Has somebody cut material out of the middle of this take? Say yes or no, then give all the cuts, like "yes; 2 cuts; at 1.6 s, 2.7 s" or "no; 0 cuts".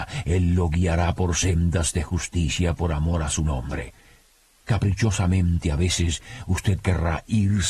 no; 0 cuts